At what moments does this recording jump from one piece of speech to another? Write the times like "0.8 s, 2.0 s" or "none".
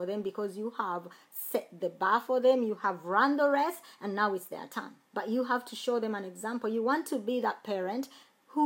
5.1 s